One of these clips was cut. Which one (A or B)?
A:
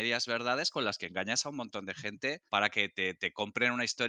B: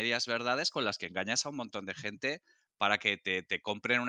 A